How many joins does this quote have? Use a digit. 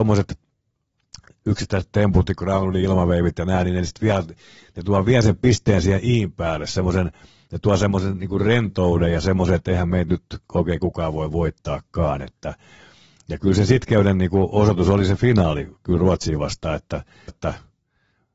1